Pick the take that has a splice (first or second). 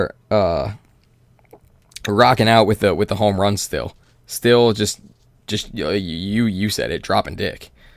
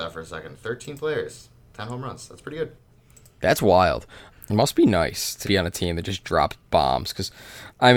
second